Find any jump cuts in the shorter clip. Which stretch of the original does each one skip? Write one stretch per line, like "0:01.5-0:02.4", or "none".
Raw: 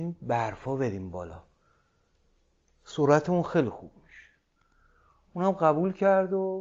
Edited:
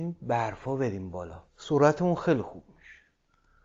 0:01.5-0:02.8